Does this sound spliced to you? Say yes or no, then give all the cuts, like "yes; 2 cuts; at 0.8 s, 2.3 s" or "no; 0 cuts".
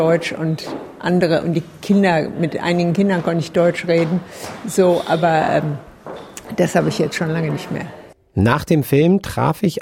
no; 0 cuts